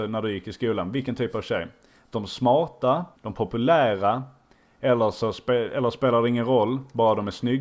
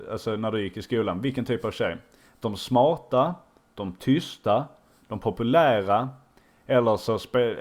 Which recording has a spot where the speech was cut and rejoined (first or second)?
first